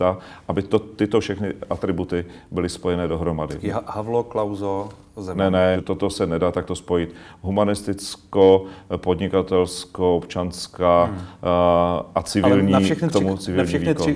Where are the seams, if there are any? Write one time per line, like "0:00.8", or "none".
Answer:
0:05.7